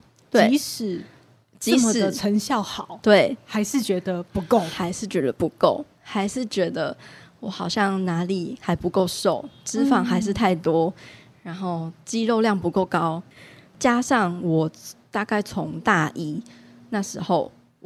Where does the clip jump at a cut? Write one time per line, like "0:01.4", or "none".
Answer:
none